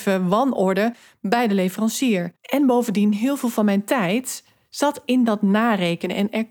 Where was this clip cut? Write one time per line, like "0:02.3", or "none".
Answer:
0:02.4